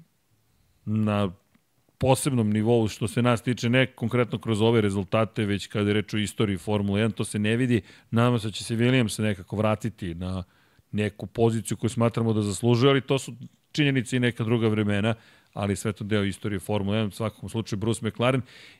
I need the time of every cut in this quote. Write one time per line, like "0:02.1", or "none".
none